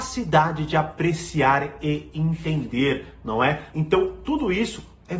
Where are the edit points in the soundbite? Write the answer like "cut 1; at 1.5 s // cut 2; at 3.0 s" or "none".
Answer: cut 1; at 3.7 s

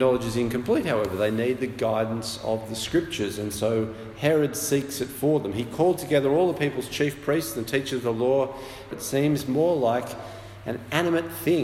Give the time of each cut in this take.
cut 1; at 8.9 s

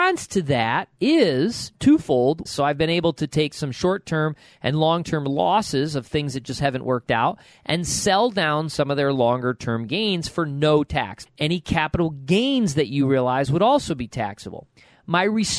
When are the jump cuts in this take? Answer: cut 1; at 2.5 s // cut 2; at 11.3 s

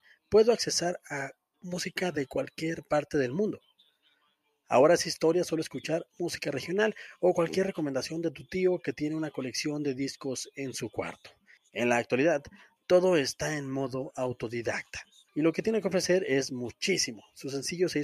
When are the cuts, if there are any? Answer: cut 1; at 11.6 s // cut 2; at 15.3 s

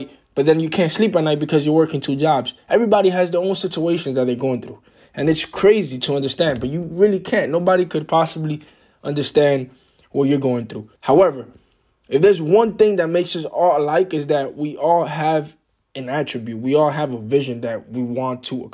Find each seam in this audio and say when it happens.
cut 1; at 11.0 s

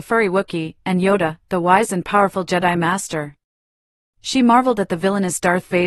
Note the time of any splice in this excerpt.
none

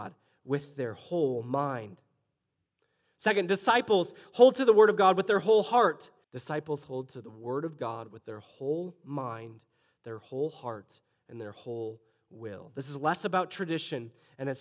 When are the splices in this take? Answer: cut 1; at 6.2 s

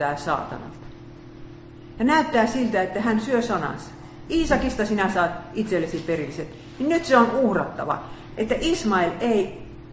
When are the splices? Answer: cut 1; at 8.3 s

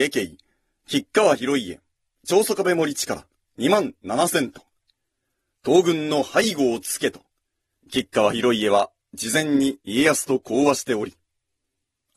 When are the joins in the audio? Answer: cut 1; at 5.6 s // cut 2; at 7.8 s

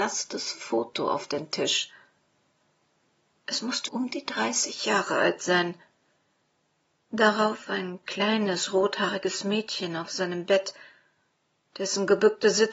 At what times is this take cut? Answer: cut 1; at 3.9 s

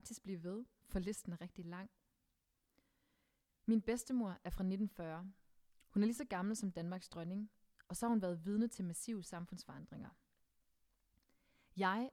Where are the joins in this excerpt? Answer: none

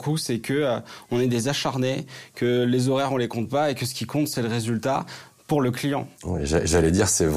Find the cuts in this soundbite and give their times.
cut 1; at 6.2 s

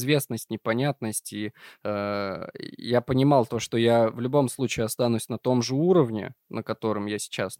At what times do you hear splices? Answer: none

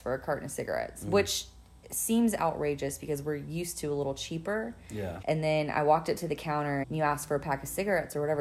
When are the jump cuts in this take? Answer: cut 1; at 5.2 s // cut 2; at 6.8 s

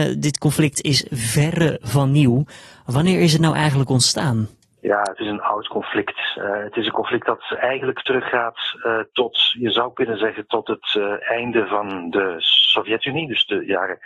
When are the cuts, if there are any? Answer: none

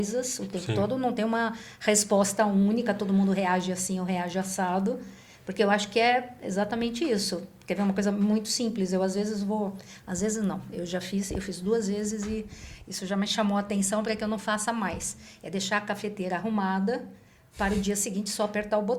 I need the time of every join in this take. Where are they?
none

